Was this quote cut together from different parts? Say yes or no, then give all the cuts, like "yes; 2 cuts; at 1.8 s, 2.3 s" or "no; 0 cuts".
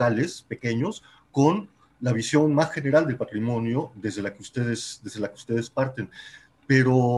no; 0 cuts